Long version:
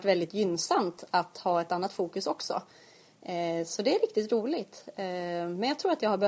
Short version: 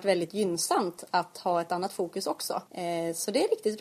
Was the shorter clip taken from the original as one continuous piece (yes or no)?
no